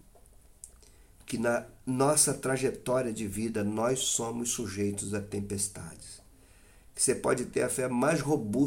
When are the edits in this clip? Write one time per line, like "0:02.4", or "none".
none